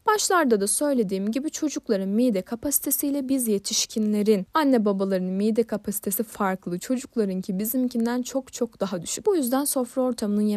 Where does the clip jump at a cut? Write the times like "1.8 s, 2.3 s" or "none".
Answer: 9.2 s